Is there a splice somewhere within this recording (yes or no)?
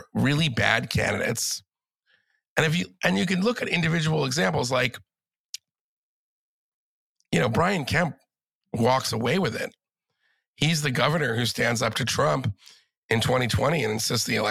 yes